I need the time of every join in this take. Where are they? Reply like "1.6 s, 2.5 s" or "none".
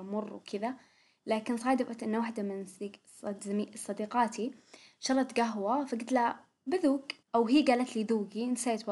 7.2 s